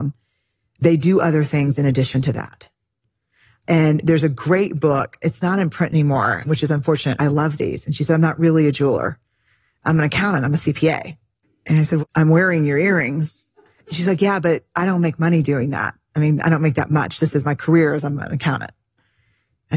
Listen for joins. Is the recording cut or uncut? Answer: cut